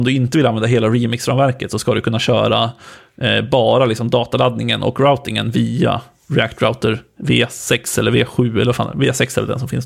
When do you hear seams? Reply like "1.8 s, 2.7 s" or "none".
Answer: none